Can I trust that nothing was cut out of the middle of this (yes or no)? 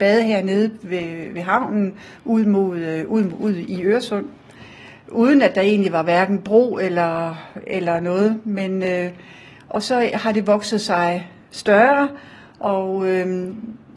yes